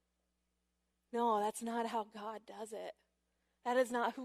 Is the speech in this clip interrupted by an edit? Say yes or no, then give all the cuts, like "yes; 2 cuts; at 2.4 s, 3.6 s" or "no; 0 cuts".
yes; 1 cut; at 0.9 s